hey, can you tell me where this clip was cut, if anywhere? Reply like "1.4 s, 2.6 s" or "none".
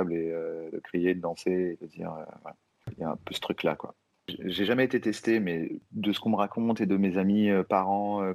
none